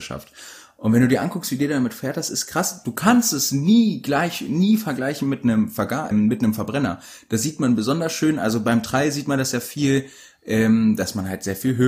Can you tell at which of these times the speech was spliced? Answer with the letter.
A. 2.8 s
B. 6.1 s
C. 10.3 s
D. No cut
B